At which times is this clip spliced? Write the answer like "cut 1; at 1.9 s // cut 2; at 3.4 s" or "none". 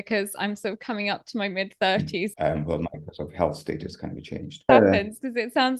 cut 1; at 2.3 s // cut 2; at 4.7 s